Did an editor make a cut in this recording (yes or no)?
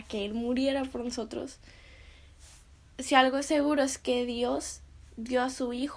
no